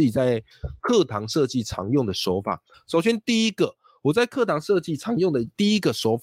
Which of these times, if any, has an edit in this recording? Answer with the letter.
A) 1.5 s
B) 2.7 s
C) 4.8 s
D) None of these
D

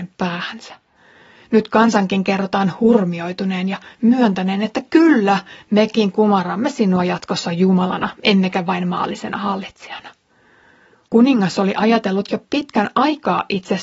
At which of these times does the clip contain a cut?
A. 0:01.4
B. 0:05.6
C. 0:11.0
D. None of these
C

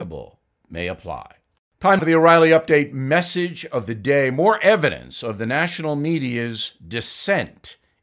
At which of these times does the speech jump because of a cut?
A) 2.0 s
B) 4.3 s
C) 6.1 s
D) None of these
A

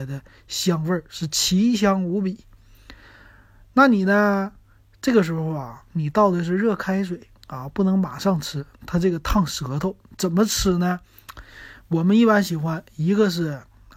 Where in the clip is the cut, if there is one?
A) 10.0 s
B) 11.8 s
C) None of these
C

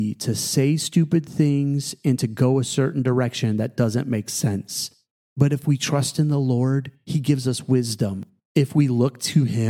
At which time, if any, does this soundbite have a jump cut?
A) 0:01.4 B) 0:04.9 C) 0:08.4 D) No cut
D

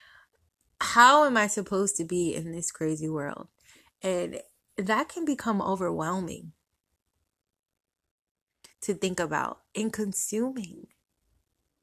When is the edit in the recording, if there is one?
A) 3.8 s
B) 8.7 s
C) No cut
B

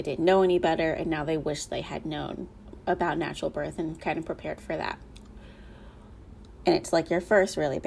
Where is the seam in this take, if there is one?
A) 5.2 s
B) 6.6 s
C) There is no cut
B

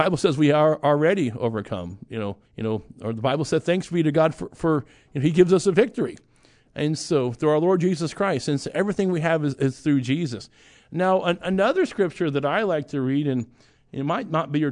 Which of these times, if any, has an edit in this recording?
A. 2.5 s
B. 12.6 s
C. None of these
A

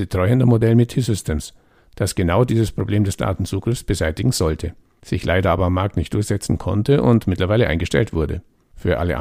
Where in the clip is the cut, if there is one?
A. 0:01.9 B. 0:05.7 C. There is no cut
C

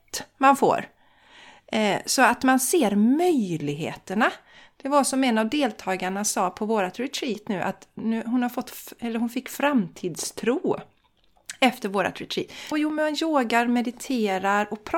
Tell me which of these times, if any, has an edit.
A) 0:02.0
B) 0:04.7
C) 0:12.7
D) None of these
C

